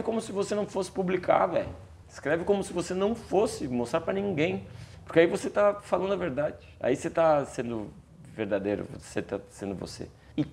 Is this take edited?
no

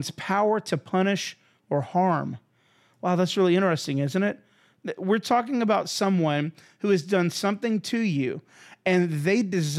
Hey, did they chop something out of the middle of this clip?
no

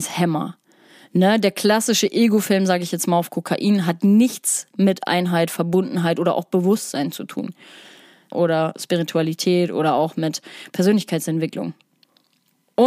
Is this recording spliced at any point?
yes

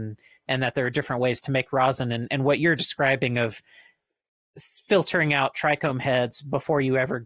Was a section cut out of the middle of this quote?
no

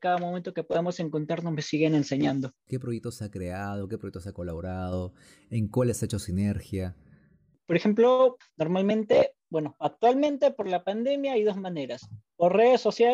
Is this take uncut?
no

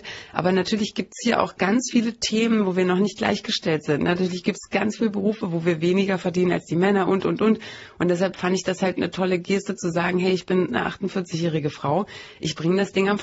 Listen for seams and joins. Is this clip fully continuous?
yes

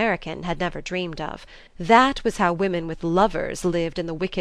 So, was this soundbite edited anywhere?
yes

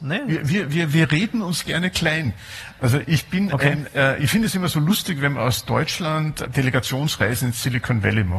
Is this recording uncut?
yes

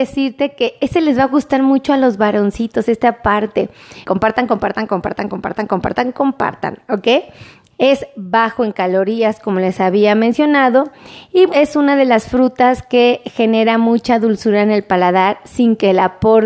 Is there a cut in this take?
yes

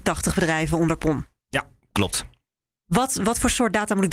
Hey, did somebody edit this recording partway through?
no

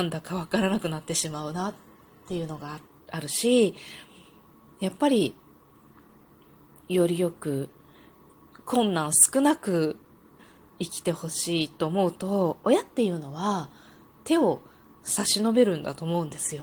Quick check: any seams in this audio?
no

